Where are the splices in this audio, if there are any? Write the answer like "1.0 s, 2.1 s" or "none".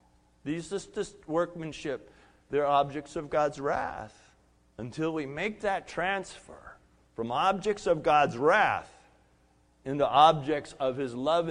none